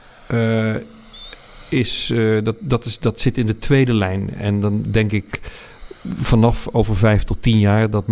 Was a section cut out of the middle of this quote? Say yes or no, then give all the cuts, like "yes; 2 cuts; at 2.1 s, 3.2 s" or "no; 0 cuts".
no; 0 cuts